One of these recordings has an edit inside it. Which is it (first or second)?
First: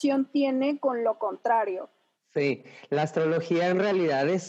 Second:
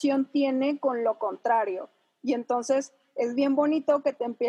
first